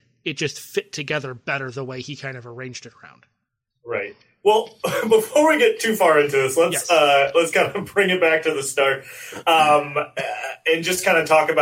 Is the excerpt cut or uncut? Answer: uncut